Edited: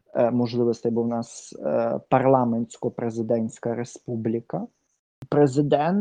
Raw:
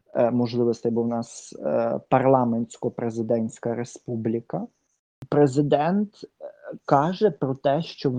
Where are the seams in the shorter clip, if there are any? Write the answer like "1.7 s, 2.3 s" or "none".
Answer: none